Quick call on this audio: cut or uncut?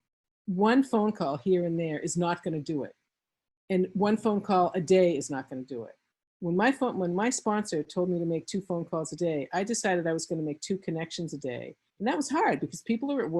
uncut